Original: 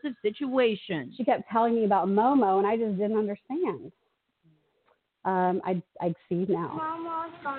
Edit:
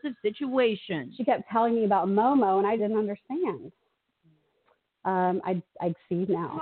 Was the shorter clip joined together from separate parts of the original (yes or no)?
yes